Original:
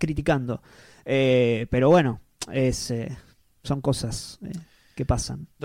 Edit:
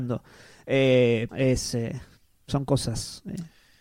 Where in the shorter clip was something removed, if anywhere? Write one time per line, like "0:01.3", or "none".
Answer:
0:01.3